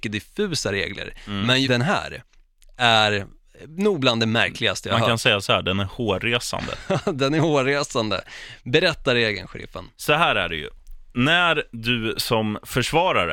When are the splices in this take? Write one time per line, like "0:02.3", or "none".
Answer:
0:01.6